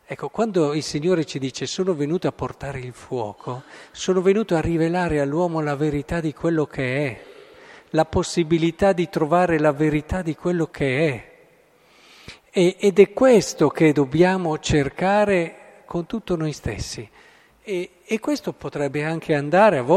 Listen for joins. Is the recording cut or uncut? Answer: uncut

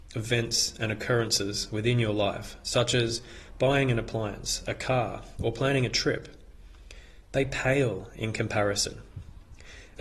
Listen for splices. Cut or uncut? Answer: cut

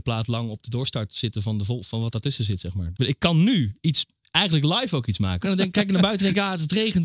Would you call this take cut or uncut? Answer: cut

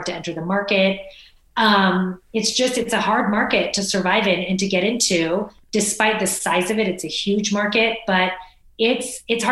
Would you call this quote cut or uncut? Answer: uncut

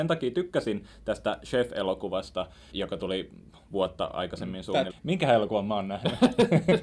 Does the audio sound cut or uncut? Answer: cut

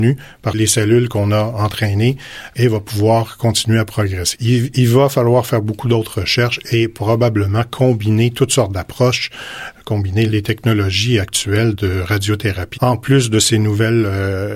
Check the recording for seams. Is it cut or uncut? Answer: cut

